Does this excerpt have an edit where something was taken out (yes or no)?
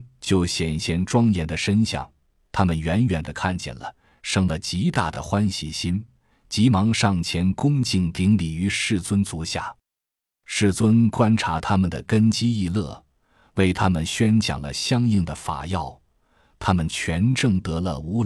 no